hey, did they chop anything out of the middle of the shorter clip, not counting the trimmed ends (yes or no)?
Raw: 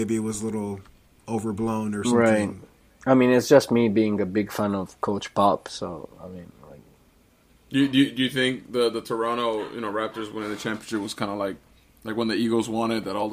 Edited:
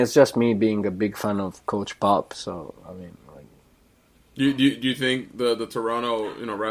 no